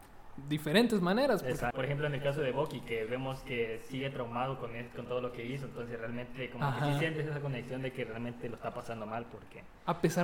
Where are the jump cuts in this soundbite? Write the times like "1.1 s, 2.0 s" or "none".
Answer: 1.7 s

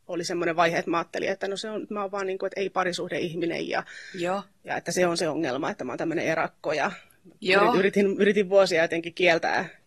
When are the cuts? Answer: none

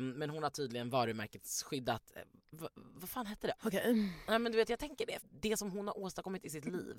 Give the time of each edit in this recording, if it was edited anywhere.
3.6 s, 5.2 s

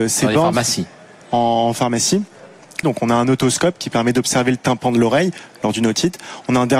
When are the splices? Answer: 1.2 s, 2.8 s

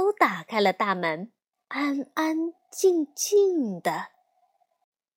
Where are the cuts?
1.5 s

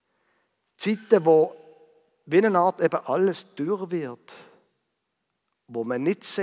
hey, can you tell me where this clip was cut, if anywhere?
none

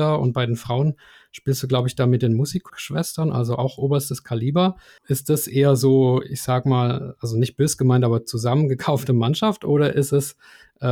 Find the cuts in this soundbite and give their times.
2.7 s

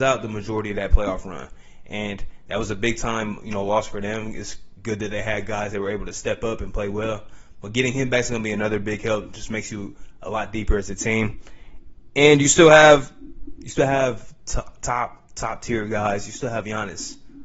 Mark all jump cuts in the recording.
none

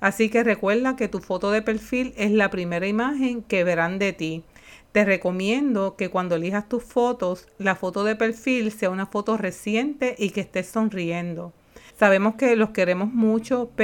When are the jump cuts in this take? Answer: 11.9 s

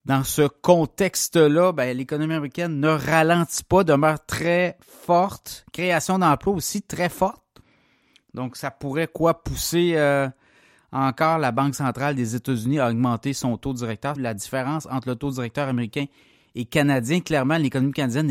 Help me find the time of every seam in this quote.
14.2 s

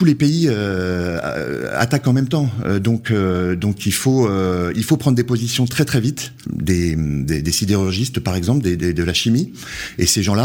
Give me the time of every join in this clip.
6.4 s

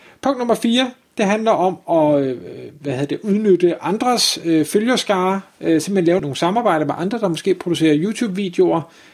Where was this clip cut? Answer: 6.2 s

